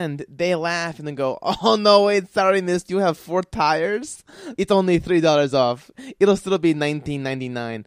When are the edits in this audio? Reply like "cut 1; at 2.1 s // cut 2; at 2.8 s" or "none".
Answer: cut 1; at 4.6 s